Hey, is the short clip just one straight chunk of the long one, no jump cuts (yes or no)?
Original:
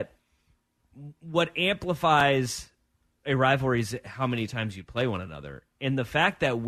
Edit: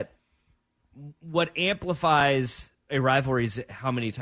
no